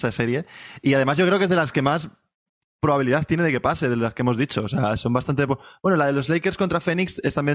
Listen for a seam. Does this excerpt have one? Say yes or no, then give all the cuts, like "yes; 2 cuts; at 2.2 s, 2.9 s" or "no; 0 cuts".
no; 0 cuts